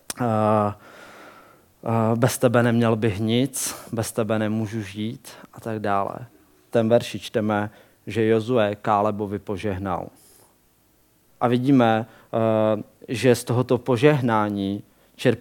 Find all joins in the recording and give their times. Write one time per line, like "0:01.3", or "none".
0:06.7
0:11.3